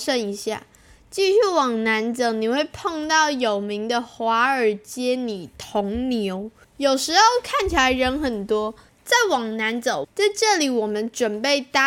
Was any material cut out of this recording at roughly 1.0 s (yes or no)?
no